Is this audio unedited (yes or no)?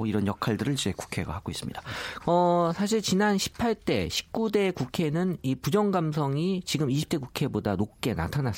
no